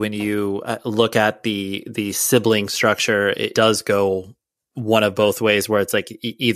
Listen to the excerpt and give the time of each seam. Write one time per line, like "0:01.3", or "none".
0:03.5